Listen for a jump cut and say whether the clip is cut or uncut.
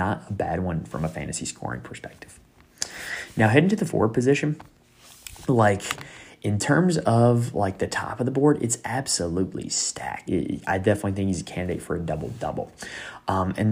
cut